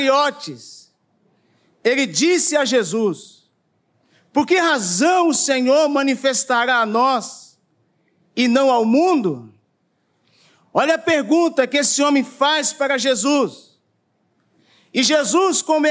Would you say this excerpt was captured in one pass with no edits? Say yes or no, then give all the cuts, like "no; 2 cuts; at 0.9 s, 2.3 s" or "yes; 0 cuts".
yes; 0 cuts